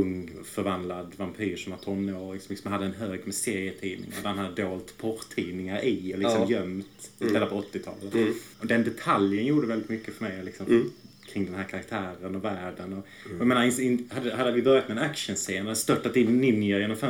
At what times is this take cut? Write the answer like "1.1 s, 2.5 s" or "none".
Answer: 8.5 s